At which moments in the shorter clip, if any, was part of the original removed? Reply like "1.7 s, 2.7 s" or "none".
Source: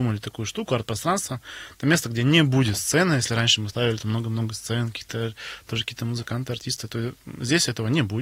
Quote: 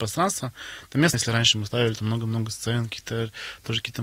1.1 s